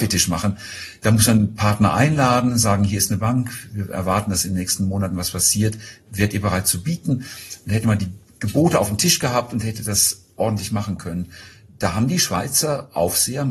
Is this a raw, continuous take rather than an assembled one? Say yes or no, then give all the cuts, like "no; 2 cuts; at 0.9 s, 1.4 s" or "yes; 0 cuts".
yes; 0 cuts